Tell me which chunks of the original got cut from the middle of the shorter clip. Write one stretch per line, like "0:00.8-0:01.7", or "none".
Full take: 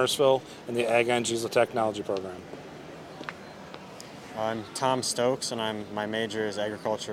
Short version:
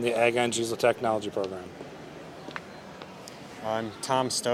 none

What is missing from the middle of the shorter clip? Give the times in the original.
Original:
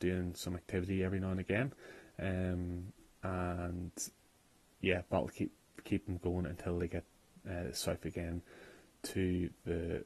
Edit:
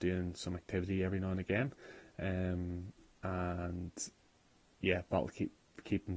none

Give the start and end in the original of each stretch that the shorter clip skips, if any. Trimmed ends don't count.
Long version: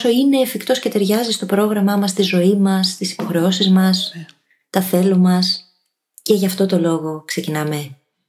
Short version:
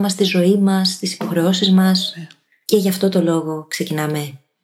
0:04.6-0:06.2

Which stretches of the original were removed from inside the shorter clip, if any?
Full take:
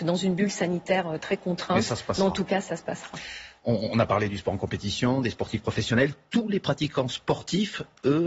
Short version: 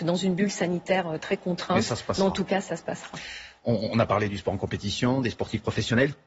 none

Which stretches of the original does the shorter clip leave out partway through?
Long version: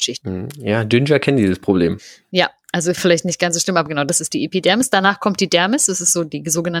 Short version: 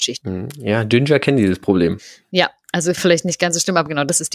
none

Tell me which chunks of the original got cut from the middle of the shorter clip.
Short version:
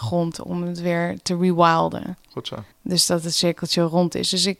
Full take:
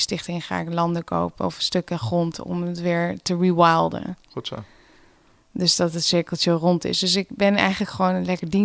0:04.7-0:05.4

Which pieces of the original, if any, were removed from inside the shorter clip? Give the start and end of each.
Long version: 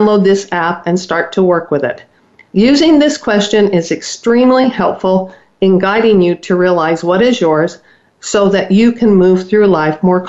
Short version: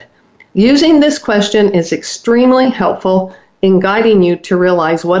none

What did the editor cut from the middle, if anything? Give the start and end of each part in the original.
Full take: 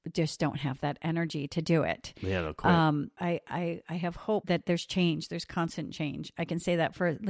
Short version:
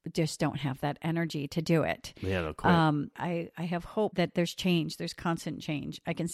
0:03.1-0:03.4

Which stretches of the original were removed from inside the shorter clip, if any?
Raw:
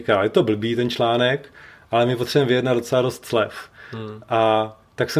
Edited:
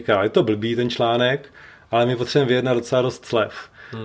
none

